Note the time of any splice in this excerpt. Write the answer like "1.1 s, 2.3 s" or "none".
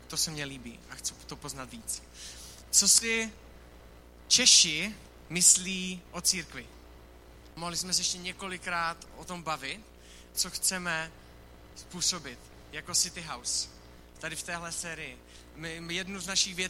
7.5 s, 10.3 s